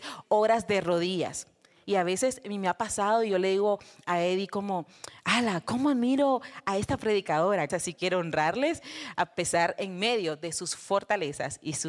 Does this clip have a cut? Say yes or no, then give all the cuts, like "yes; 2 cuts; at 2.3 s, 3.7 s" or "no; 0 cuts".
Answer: yes; 2 cuts; at 1.8 s, 7.7 s